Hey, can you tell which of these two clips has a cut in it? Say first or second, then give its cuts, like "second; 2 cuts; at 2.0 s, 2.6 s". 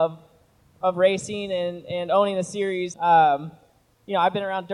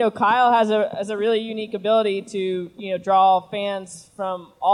first; 1 cut; at 2.9 s